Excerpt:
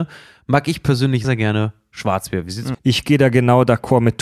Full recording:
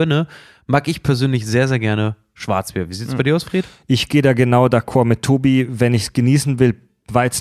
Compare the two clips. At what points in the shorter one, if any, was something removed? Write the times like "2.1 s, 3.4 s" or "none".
1.2 s, 2.7 s